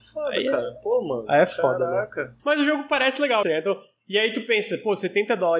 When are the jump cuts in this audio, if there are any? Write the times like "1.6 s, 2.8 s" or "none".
2.4 s, 3.4 s